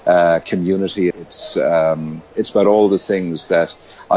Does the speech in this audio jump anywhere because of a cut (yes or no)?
yes